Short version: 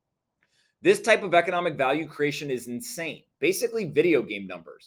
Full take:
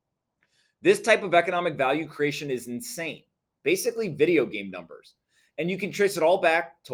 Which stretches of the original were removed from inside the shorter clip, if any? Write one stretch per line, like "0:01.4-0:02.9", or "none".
0:03.3-0:03.6